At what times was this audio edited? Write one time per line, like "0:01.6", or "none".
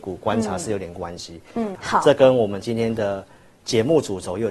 0:01.8